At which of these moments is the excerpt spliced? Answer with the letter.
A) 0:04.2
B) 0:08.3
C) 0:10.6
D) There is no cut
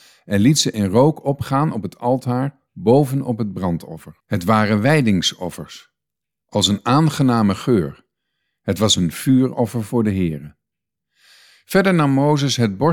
A